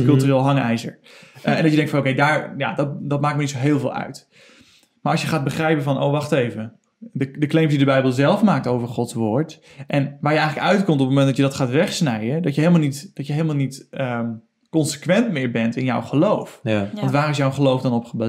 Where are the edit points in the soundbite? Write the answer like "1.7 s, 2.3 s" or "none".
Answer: none